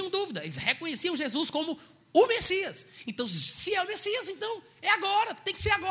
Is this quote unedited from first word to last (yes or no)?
yes